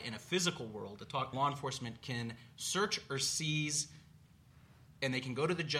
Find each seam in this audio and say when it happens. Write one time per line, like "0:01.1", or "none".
0:01.3